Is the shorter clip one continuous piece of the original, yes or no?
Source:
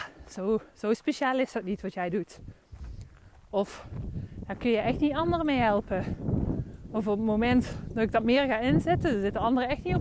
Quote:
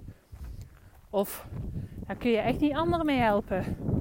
yes